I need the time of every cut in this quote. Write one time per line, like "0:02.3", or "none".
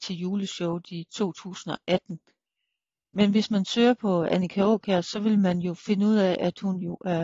none